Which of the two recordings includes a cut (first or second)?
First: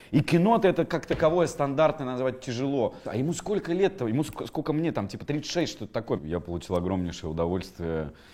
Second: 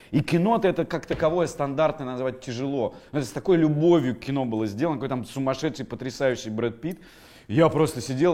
first